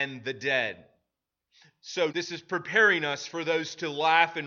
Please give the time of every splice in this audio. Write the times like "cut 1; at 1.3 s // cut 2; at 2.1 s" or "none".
cut 1; at 2.1 s

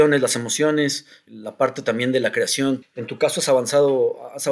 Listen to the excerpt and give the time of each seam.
cut 1; at 1.3 s // cut 2; at 2.8 s

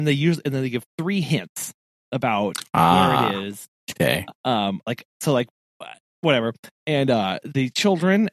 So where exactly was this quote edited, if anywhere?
none

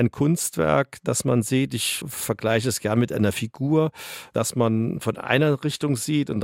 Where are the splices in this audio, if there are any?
cut 1; at 2.0 s

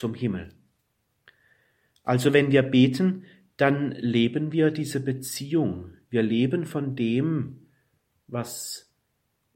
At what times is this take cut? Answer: none

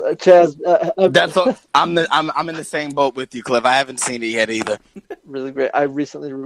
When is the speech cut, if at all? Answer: cut 1; at 5.2 s

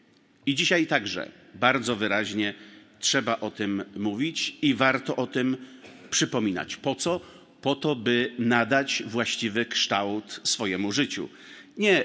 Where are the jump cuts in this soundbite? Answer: none

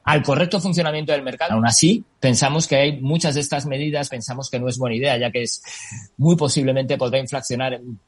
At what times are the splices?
cut 1; at 1.5 s // cut 2; at 4.1 s

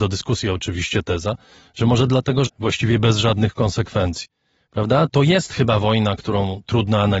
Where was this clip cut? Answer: cut 1; at 2.5 s // cut 2; at 5.1 s

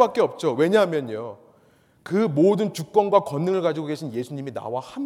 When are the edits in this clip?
none

